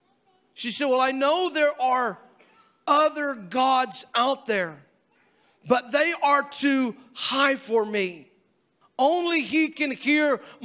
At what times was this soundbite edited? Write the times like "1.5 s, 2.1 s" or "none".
8.8 s